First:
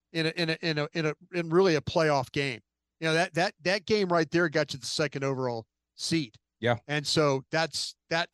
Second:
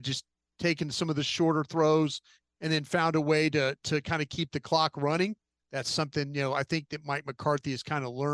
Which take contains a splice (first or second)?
second